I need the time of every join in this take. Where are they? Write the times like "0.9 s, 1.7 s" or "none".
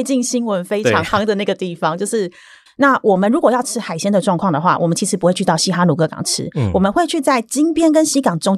2.7 s